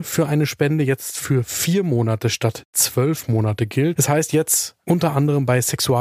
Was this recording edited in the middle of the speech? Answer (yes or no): yes